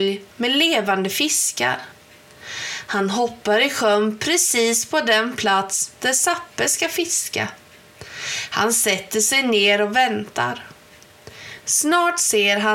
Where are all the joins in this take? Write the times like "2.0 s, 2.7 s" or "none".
none